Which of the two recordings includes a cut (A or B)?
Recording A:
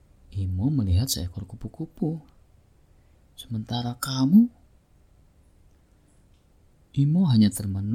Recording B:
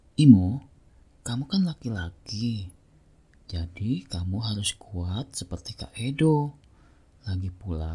A